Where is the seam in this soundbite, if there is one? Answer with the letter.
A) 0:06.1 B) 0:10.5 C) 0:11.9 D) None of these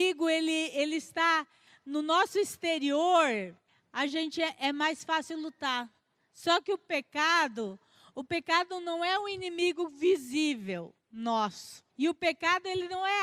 C